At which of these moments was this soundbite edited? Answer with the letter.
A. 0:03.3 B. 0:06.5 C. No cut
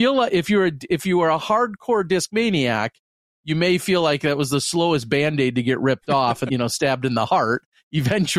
B